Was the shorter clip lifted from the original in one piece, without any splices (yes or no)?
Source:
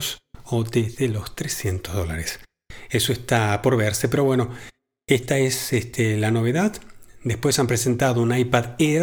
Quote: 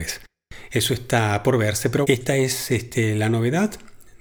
no